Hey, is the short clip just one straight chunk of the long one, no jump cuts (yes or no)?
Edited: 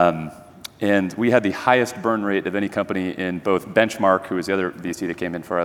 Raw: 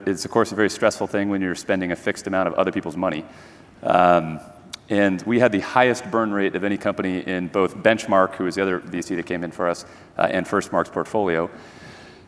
yes